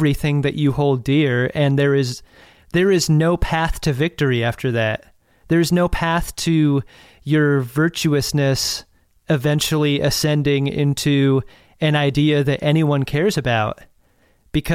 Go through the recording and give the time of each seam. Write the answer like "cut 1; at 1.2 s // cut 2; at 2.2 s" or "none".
none